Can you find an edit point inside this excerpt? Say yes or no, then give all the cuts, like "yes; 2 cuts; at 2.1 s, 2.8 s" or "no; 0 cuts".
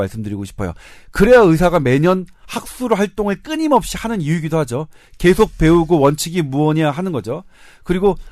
no; 0 cuts